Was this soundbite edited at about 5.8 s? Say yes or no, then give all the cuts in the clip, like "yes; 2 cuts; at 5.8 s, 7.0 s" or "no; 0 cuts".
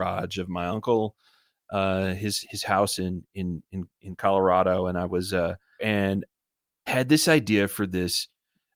yes; 2 cuts; at 5.8 s, 6.9 s